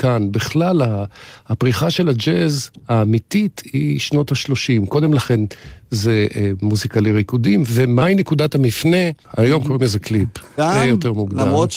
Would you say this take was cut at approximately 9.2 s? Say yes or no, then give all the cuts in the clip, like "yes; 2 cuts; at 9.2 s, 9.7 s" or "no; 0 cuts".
yes; 2 cuts; at 9.2 s, 10.6 s